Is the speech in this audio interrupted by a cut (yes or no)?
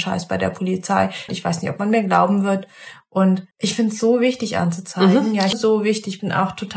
yes